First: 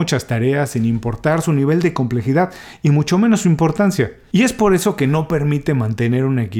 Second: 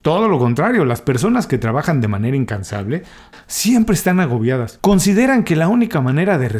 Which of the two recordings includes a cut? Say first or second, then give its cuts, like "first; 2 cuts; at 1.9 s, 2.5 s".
second; 2 cuts; at 3.3 s, 4.8 s